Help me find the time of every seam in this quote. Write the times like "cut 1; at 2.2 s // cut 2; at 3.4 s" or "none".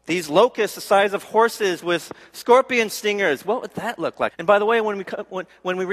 cut 1; at 4.3 s